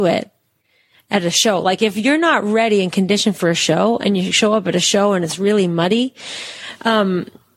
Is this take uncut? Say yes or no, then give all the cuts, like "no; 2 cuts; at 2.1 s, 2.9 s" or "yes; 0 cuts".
yes; 0 cuts